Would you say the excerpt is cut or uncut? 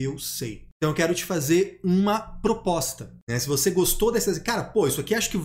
uncut